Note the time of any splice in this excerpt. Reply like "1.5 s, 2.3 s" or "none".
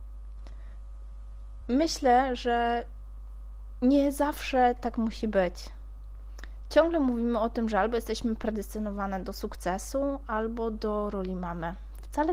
1.6 s